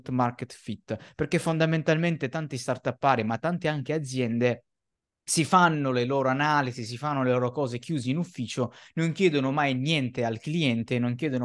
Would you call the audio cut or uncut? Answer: uncut